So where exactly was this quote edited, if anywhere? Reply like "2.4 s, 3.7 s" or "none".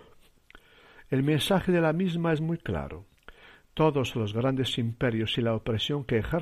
none

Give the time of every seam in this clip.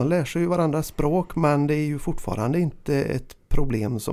none

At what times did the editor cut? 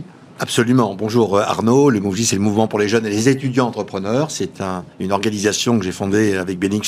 4.9 s

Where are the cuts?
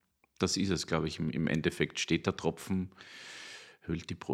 none

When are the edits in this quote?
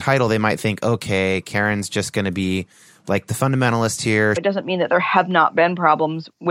4.4 s

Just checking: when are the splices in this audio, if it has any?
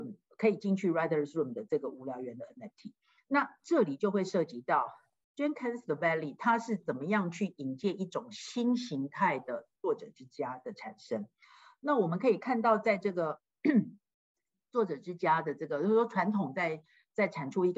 none

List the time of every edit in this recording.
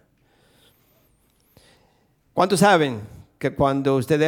2.3 s

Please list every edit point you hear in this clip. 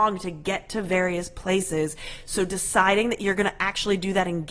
none

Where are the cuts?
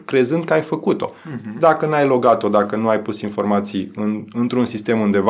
none

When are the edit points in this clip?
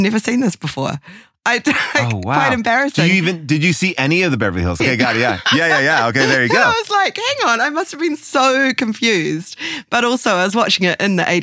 4.8 s

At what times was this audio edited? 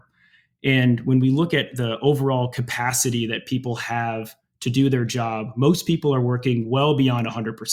none

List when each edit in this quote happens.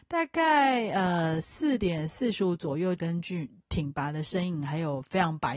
3.0 s

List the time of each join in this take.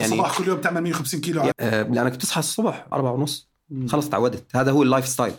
1.5 s, 2.9 s

